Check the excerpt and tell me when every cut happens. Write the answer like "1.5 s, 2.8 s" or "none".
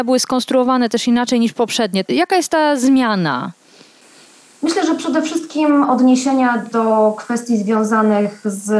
none